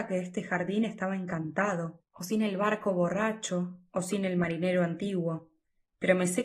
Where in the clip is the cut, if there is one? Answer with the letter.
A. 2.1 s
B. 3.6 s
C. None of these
A